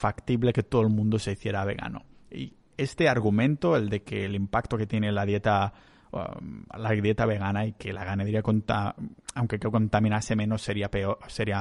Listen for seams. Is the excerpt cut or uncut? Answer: uncut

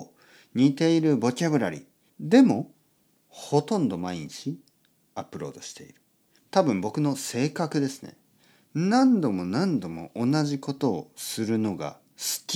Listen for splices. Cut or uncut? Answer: cut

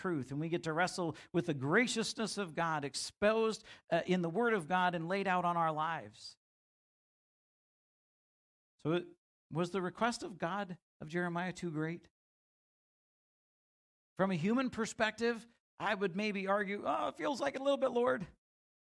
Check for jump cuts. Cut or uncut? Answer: uncut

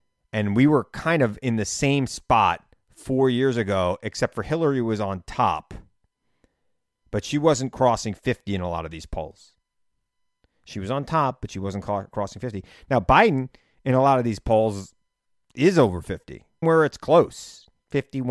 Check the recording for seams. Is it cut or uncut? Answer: cut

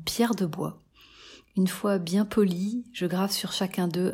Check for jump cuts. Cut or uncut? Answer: uncut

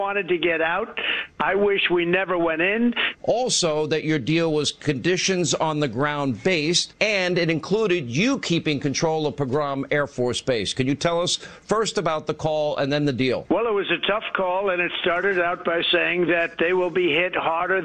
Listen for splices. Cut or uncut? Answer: cut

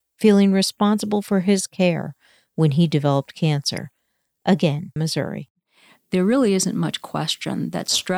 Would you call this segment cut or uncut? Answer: cut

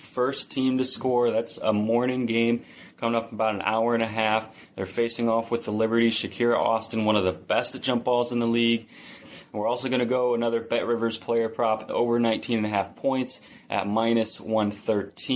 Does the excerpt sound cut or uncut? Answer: cut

